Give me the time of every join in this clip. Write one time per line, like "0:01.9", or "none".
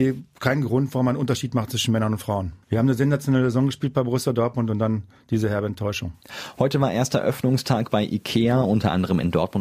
none